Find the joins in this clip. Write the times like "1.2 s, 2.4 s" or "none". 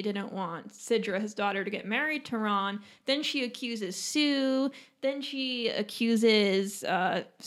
none